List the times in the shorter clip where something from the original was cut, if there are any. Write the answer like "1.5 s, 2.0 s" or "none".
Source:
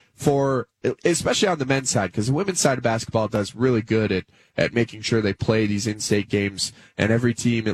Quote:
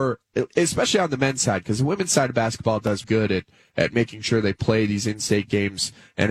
3.0 s

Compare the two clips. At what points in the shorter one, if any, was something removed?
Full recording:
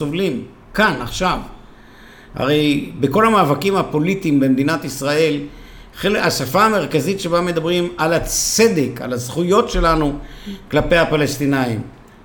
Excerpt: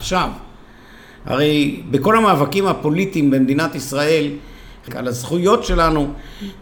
4.9 s

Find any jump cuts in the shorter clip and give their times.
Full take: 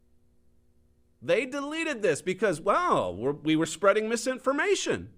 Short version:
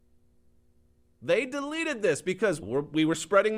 2.6 s

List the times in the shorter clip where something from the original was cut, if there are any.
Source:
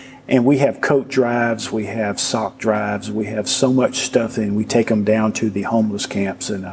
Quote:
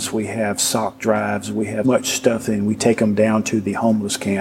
1.8 s

